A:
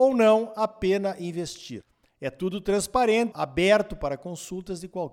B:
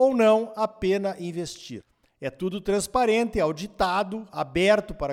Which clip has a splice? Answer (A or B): A